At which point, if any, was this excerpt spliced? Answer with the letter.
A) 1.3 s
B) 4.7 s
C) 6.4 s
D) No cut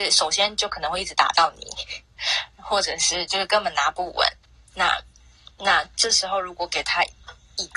D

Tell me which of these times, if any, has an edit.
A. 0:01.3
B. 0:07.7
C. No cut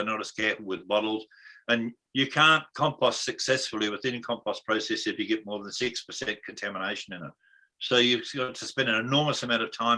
C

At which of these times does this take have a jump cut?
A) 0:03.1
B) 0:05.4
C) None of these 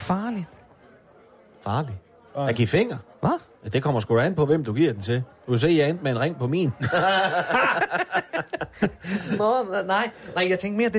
C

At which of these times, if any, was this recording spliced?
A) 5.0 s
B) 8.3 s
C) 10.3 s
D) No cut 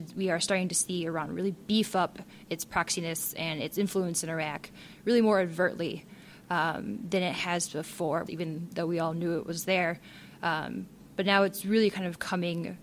B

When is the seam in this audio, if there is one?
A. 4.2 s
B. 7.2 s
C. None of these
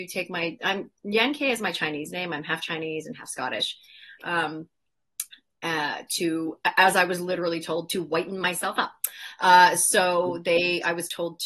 A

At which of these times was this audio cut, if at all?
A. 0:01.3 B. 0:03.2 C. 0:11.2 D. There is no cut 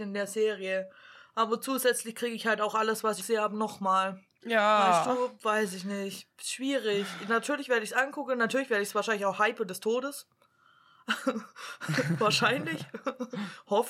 B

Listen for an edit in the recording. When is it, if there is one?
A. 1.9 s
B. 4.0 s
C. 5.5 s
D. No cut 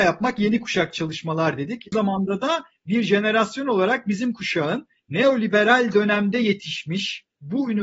A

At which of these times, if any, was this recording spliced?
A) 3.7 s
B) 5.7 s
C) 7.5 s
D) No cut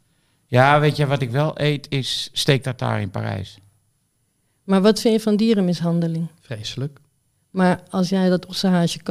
D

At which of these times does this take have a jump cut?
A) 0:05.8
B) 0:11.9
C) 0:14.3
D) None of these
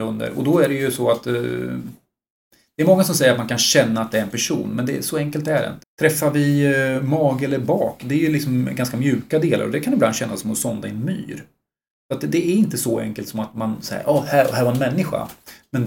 A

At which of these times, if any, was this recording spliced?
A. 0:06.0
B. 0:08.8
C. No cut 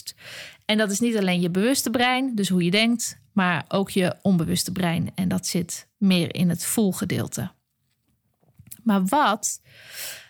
A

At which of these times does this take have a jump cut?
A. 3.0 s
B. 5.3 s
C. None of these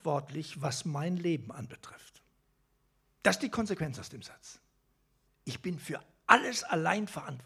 B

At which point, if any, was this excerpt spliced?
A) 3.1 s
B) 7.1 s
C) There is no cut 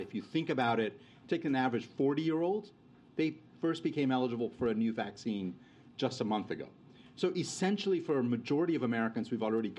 A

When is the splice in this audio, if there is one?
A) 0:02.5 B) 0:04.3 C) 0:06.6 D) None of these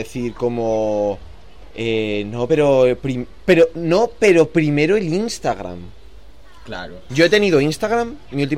D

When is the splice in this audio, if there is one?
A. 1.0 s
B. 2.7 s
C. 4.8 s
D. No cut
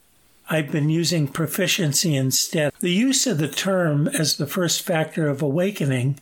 B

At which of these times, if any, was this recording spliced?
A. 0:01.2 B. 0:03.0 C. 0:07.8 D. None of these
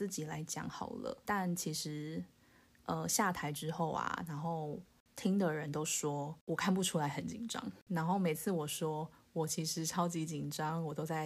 A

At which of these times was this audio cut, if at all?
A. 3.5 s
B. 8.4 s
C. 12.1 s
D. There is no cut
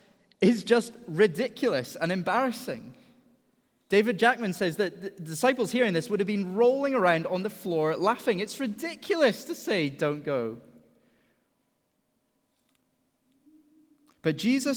D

